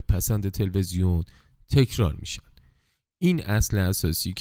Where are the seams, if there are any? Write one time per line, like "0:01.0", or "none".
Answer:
none